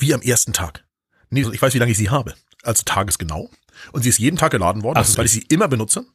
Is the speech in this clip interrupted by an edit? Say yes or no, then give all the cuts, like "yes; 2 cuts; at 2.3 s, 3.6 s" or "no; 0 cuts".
yes; 2 cuts; at 1.4 s, 5.1 s